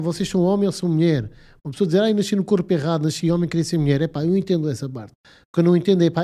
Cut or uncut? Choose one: uncut